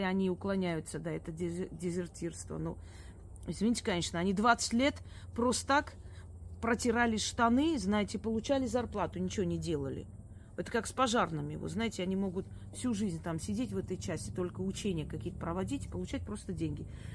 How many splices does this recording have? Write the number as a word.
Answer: zero